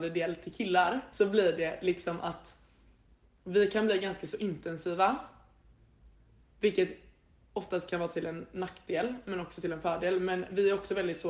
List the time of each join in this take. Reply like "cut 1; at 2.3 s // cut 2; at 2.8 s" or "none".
cut 1; at 1.1 s